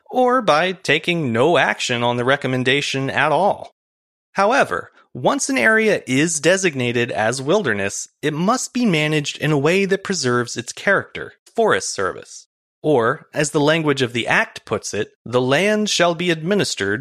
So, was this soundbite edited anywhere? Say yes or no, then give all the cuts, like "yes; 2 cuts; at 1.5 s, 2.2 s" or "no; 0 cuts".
yes; 3 cuts; at 11.5 s, 12.7 s, 15.2 s